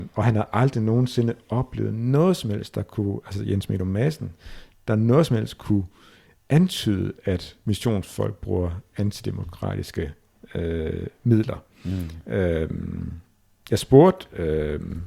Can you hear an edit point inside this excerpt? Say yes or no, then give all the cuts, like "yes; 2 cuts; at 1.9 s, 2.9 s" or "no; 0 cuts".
no; 0 cuts